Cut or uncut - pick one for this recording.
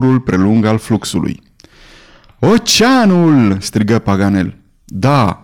uncut